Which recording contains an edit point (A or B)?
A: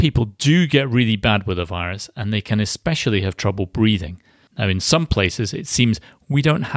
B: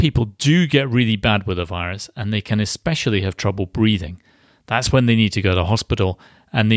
A